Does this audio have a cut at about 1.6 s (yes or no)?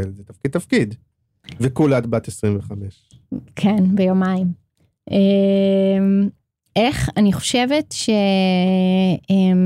no